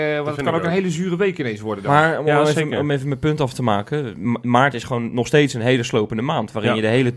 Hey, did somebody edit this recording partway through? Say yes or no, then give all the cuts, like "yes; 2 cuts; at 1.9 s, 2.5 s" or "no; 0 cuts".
no; 0 cuts